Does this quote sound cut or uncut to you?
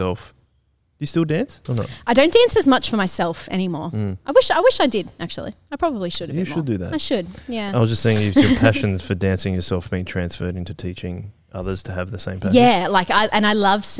uncut